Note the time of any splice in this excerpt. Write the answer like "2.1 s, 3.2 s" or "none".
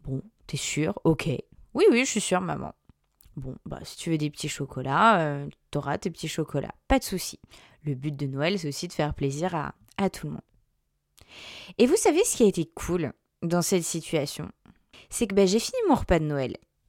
none